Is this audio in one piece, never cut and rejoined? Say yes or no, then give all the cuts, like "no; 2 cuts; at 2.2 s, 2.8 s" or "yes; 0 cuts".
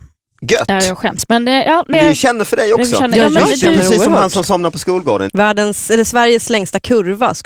no; 2 cuts; at 1.9 s, 5.3 s